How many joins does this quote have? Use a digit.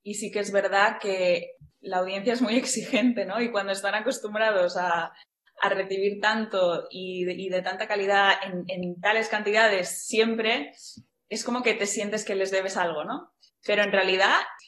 0